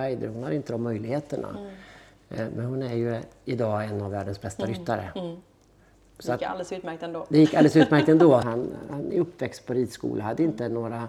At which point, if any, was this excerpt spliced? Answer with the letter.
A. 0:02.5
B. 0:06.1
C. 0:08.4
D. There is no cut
C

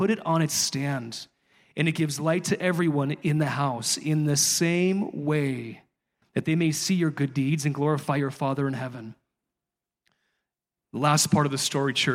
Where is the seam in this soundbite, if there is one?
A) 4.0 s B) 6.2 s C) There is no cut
B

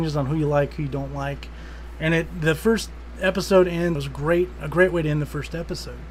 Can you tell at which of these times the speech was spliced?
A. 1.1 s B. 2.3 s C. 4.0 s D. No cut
C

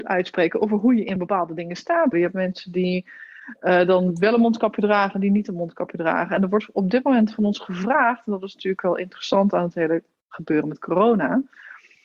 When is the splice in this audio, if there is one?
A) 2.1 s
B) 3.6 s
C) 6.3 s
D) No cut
A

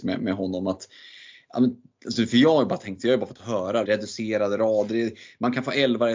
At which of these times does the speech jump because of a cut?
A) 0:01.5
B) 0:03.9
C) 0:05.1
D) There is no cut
B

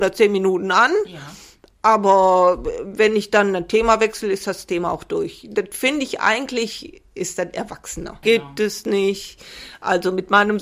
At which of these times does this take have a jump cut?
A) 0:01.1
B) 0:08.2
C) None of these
B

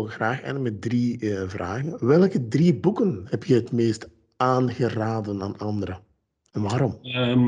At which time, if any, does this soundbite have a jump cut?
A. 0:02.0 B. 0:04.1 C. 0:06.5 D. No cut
D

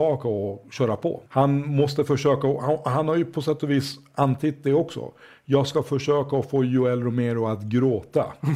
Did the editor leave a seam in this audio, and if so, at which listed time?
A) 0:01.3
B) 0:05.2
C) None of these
A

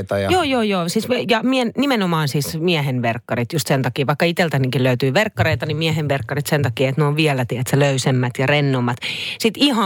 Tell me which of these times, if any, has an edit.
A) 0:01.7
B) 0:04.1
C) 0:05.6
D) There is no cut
D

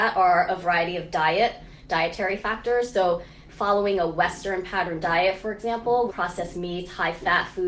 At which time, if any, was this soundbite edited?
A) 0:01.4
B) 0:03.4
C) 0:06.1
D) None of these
C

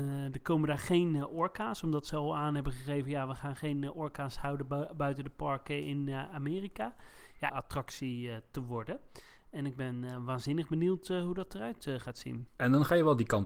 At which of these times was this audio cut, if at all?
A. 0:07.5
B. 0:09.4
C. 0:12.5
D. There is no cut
A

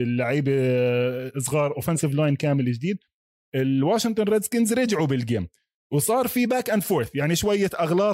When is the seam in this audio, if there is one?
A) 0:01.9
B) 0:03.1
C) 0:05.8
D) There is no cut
D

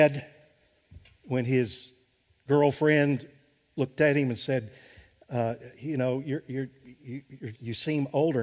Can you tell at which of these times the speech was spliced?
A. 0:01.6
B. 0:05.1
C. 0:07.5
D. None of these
C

